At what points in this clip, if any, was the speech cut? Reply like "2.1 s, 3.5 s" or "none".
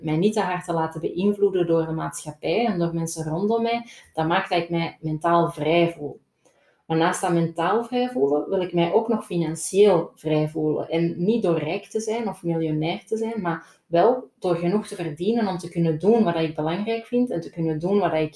none